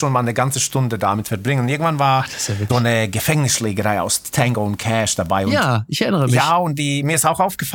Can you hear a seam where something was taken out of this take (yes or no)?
yes